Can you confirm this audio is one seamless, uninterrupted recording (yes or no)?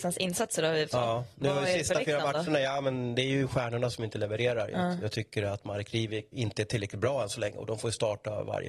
no